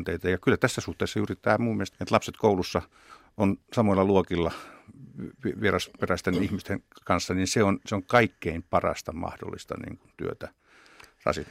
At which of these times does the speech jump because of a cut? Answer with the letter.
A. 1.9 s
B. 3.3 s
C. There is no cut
A